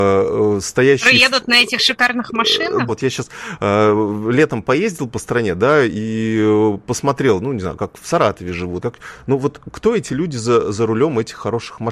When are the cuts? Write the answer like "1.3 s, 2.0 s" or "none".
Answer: 2.9 s, 8.8 s

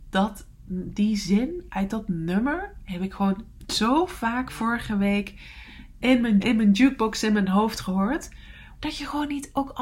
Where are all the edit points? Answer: 6.4 s, 8.8 s

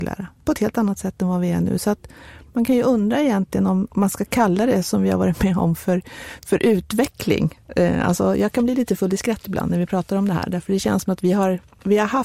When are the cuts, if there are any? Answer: none

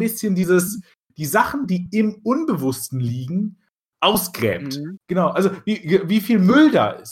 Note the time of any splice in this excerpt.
5.0 s

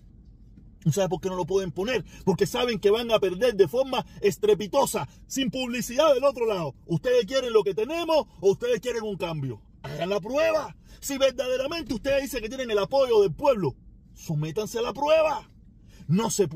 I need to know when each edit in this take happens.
none

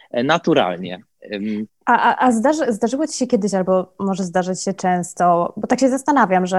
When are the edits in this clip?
1.7 s

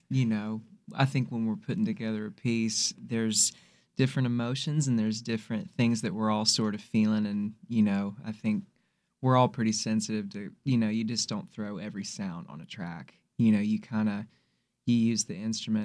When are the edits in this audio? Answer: 3.0 s

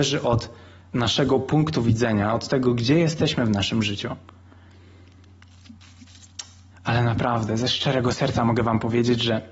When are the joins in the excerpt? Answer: 6.7 s

